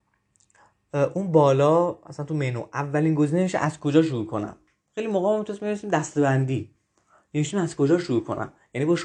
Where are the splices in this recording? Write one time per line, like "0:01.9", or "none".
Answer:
none

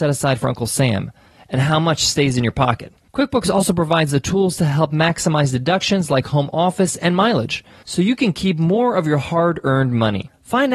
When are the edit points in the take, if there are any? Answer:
none

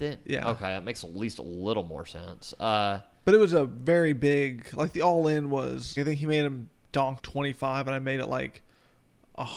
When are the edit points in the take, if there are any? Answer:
0:06.0
0:07.2

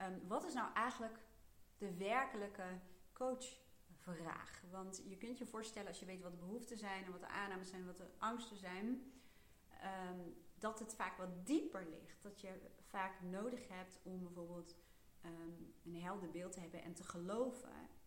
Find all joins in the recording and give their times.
none

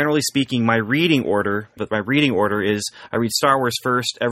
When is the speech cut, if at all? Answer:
0:01.8

